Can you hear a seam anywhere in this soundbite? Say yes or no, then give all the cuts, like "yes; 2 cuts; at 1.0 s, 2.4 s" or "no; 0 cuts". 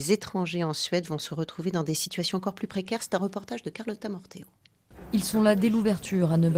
no; 0 cuts